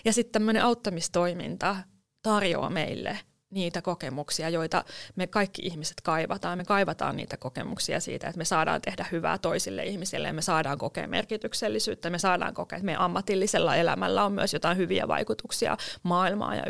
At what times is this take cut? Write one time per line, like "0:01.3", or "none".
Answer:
none

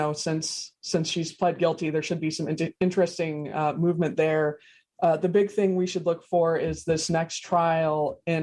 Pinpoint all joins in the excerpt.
none

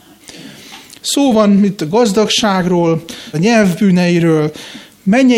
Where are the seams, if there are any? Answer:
0:01.0
0:03.3

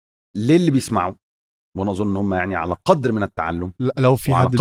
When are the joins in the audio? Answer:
none

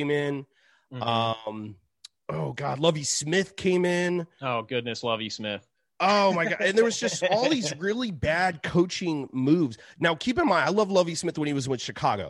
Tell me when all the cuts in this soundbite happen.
none

